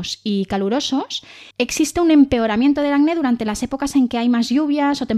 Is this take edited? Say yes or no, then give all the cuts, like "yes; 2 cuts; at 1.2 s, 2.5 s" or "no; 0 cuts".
yes; 1 cut; at 1.5 s